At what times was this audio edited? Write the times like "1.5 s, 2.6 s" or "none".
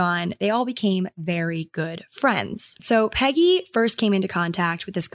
2.8 s